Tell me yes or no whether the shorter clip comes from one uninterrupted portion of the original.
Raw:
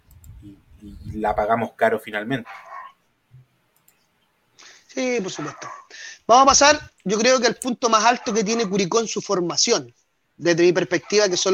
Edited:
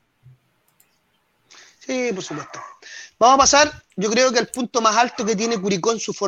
yes